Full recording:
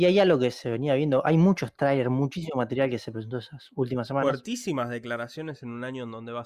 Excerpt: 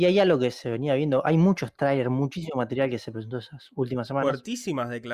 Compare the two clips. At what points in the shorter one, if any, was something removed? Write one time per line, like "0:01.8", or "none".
none